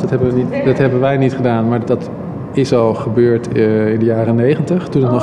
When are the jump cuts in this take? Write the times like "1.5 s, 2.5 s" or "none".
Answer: 1.8 s